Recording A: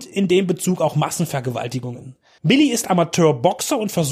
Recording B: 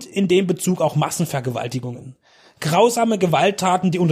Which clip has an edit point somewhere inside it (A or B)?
A